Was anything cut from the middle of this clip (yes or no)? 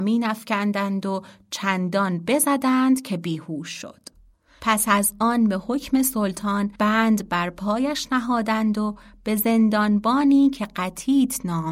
yes